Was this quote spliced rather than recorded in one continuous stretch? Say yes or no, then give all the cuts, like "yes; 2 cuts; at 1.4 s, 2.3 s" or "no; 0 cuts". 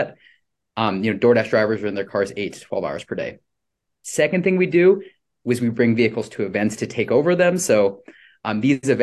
no; 0 cuts